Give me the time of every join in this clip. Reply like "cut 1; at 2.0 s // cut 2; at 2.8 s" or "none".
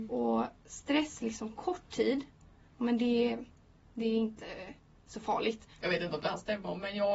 cut 1; at 5.8 s